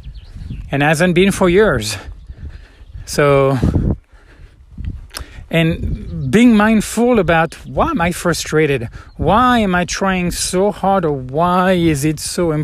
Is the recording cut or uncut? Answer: uncut